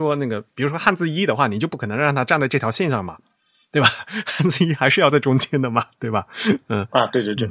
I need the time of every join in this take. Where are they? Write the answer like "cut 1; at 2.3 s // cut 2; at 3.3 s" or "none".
none